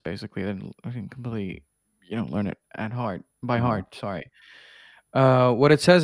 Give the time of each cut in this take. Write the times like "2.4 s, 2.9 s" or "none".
none